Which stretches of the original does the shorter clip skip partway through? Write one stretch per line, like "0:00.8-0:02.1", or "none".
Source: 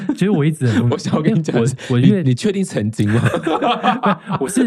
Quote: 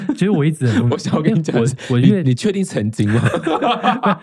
none